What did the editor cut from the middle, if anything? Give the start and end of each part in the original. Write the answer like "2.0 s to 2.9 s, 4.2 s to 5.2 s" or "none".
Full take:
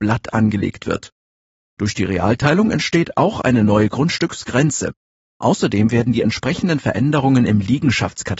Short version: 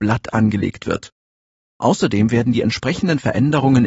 1.7 s to 5.3 s